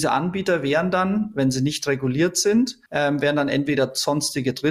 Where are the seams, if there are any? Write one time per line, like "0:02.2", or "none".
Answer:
0:02.9